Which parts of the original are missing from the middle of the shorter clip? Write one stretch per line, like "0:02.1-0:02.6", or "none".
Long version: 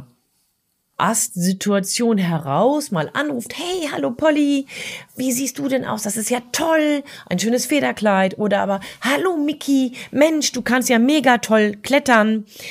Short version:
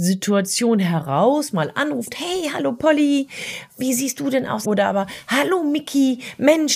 0:06.0-0:08.4